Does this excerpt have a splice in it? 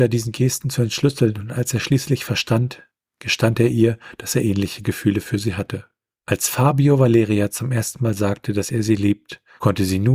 no; 0 cuts

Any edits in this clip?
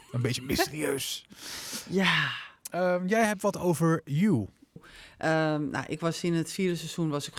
yes; 1 cut; at 4.8 s

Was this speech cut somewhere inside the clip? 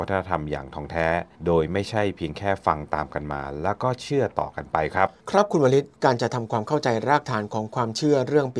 yes; 2 cuts; at 1.3 s, 5.2 s

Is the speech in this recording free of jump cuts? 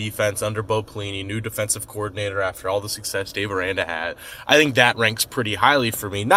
yes; 0 cuts

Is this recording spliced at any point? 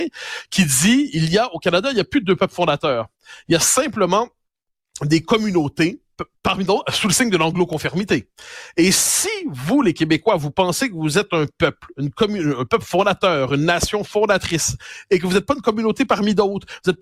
no; 0 cuts

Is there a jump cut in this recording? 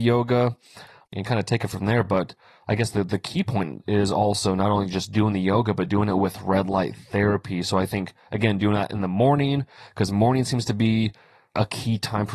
no; 0 cuts

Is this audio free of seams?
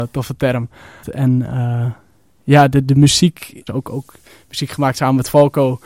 no; 2 cuts; at 1.0 s, 3.7 s

